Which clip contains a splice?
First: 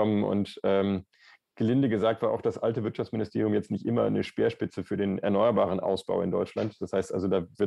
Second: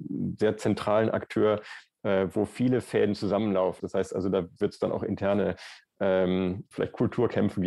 second; 2 cuts; at 3.8 s, 6.7 s

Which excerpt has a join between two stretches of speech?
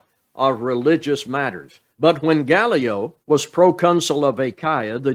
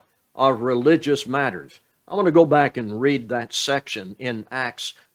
first; 2 cuts; at 1.9 s, 3.2 s

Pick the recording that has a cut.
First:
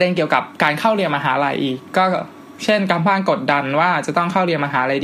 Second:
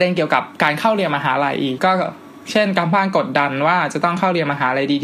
second; 1 cut; at 1.8 s

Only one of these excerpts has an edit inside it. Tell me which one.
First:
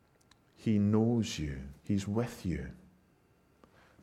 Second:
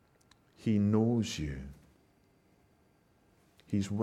first; 1 cut; at 1.8 s

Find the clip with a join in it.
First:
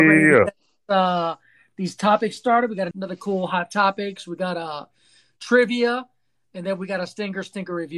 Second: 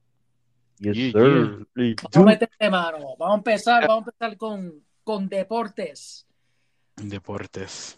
first; 1 cut; at 2.9 s

